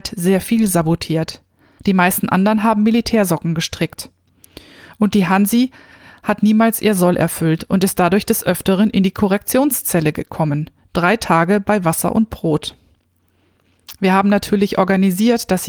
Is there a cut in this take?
yes; 1 cut; at 1.8 s

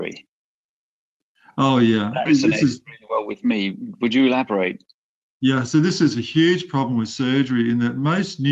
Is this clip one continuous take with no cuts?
no; 1 cut; at 2.3 s

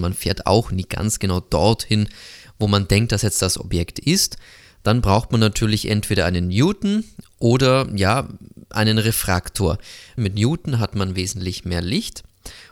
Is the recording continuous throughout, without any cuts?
no; 1 cut; at 10.2 s

